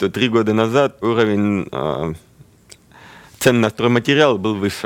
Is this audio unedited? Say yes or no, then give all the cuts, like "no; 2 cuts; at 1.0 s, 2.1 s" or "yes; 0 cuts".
no; 1 cut; at 1.0 s